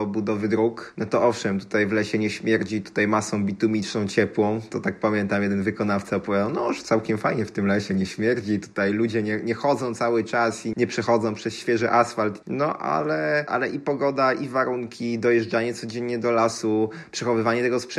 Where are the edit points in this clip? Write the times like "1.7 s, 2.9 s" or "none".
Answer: 10.7 s